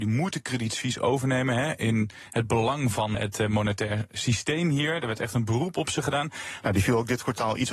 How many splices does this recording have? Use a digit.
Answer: 2